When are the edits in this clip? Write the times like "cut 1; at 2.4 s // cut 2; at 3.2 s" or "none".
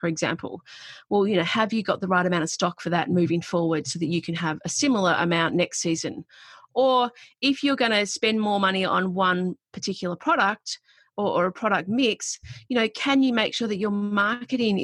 none